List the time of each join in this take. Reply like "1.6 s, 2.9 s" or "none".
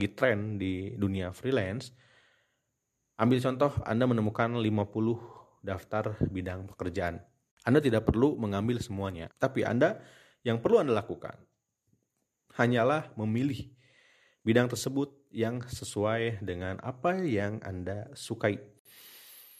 9.3 s